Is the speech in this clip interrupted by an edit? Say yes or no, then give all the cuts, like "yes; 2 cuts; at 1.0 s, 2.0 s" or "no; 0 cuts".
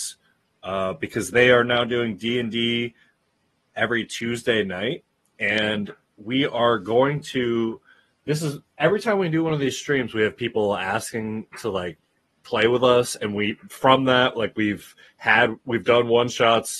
no; 0 cuts